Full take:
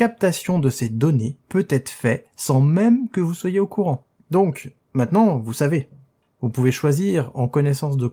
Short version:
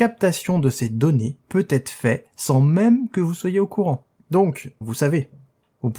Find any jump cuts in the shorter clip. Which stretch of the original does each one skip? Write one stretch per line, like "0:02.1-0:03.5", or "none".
0:04.8-0:05.4